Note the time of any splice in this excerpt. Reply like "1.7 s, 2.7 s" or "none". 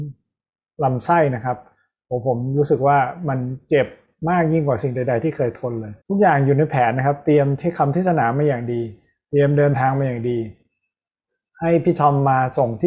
6.0 s